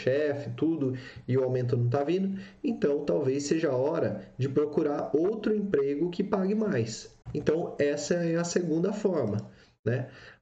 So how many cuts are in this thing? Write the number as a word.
one